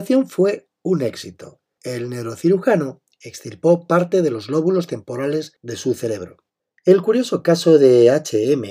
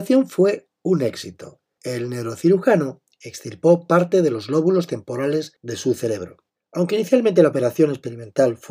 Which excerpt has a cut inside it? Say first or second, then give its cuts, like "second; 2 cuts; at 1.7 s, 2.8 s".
second; 1 cut; at 6.6 s